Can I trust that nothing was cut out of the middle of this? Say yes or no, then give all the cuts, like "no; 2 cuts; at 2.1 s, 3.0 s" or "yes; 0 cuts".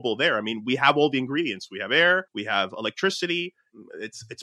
no; 1 cut; at 2.3 s